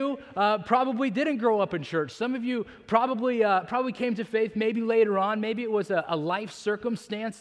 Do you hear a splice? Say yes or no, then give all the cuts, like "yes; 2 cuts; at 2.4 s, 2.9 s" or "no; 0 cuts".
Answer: no; 0 cuts